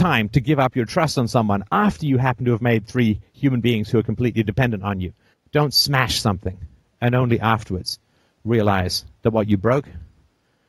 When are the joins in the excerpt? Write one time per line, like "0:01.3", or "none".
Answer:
0:05.3